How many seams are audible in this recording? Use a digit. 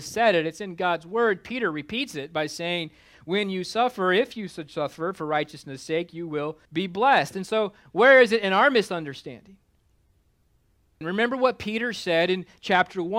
2